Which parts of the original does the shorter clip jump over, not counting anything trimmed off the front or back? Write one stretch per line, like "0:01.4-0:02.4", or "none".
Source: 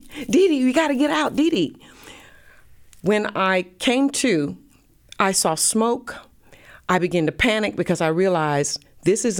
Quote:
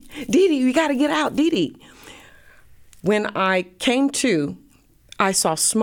none